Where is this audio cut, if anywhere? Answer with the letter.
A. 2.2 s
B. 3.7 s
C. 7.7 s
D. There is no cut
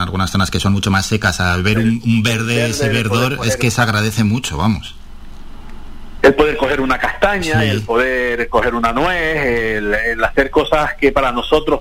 D